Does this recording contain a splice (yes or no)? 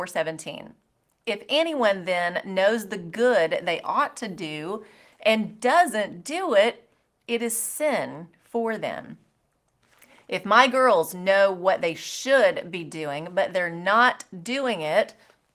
no